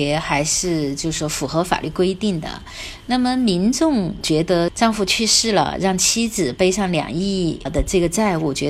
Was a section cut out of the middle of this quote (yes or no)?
no